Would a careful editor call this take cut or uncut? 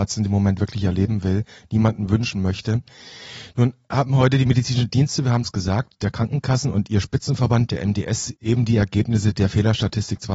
uncut